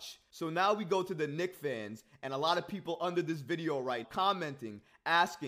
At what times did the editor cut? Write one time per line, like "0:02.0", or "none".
0:04.0